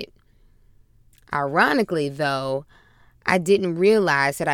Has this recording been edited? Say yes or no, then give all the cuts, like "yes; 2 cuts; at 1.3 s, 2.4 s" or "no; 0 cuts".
no; 0 cuts